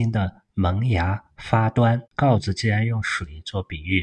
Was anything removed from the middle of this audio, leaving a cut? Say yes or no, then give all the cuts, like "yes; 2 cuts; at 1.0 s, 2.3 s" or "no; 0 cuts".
yes; 1 cut; at 2.1 s